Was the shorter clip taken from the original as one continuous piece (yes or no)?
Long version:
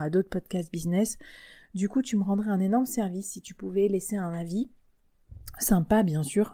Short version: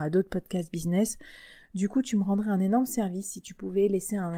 yes